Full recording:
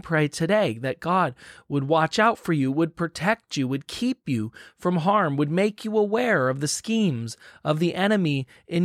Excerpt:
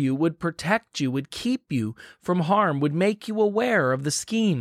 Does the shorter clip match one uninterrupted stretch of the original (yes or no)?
yes